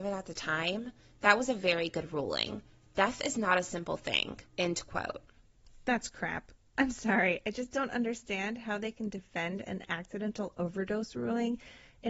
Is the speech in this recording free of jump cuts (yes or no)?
no